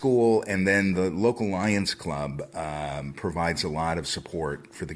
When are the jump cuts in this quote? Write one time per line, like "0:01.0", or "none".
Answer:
none